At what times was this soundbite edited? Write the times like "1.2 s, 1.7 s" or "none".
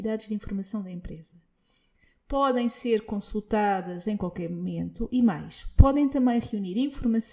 none